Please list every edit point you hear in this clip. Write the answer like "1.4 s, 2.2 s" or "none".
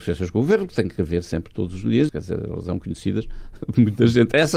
2.1 s